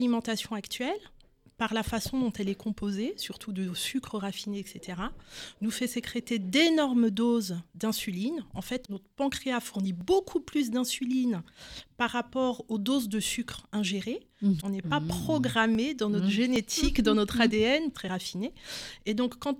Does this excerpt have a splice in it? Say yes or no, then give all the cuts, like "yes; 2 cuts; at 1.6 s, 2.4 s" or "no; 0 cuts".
yes; 3 cuts; at 8.8 s, 14.6 s, 17.9 s